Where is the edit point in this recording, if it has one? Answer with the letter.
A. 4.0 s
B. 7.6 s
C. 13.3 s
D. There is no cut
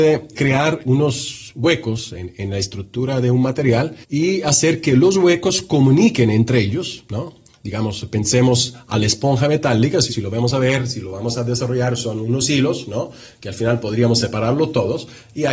A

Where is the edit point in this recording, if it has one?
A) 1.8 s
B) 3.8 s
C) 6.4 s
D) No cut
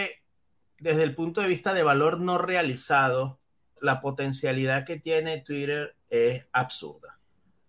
B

